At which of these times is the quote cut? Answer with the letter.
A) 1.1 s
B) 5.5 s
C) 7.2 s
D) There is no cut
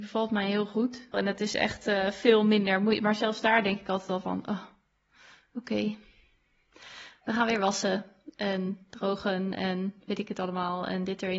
A